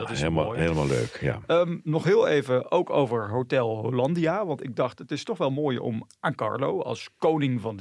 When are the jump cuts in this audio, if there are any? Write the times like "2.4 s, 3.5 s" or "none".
none